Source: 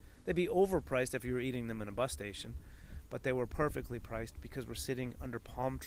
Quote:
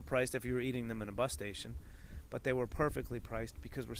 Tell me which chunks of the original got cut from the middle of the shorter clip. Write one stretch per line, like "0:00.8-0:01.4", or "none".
none